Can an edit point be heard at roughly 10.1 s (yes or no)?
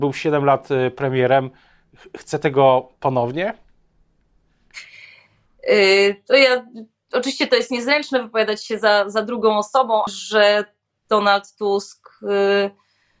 yes